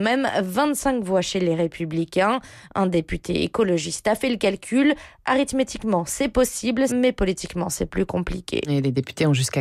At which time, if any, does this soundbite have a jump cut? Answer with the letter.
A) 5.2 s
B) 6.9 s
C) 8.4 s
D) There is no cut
B